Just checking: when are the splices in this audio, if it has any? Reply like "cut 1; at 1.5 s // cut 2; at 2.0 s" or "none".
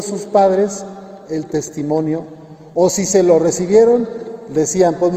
none